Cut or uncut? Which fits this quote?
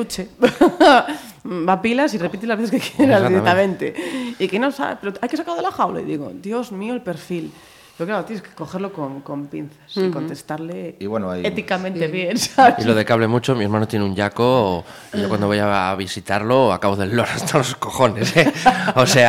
uncut